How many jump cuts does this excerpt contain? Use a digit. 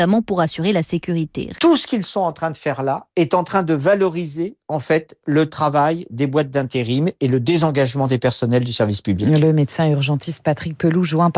1